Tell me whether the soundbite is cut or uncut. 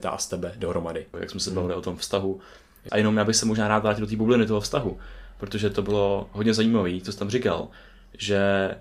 cut